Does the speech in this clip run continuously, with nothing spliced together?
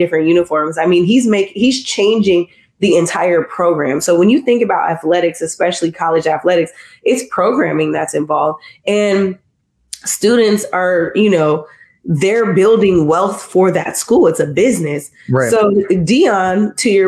yes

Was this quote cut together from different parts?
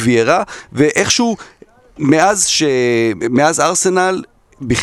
no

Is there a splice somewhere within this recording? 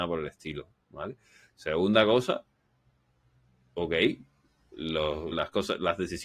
yes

